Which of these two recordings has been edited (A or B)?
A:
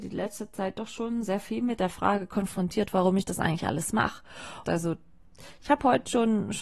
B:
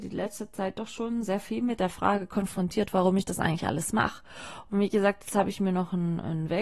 A